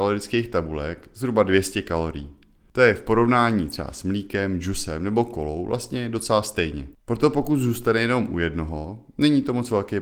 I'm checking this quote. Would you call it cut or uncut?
uncut